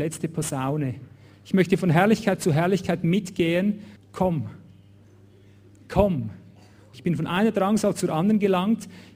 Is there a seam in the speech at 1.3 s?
no; 2 cuts; at 4.0 s, 6.9 s

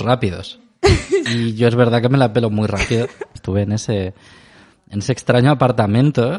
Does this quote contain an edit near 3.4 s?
yes; 2 cuts; at 1.3 s, 3.4 s

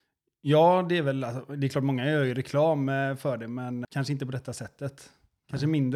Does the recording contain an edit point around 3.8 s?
yes; 1 cut; at 3.8 s

